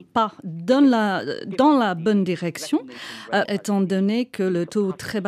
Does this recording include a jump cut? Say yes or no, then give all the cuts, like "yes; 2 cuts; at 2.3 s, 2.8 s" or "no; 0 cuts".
yes; 1 cut; at 3.5 s